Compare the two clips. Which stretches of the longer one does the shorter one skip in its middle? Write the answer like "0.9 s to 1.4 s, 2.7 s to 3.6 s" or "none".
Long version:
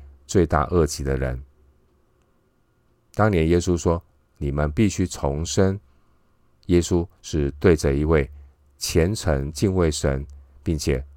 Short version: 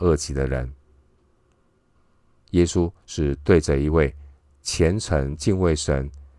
2.6 s to 6.1 s